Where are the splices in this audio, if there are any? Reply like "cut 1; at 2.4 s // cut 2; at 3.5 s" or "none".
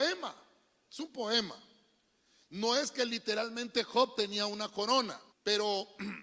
cut 1; at 5.3 s